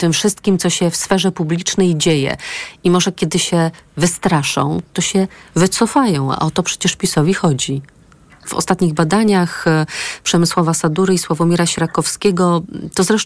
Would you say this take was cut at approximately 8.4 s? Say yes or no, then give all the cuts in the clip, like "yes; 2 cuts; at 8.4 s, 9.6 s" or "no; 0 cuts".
yes; 1 cut; at 8.4 s